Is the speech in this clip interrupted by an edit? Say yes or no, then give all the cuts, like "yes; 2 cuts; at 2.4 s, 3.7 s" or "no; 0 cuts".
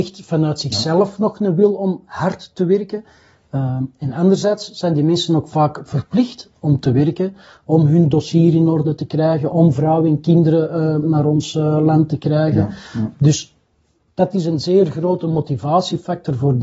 yes; 2 cuts; at 11.0 s, 13.1 s